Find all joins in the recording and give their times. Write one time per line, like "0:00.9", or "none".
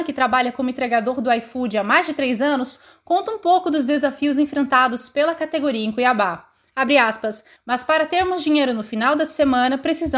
0:07.6